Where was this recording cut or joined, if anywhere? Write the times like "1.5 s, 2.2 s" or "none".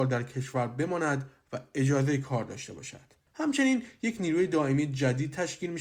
3.3 s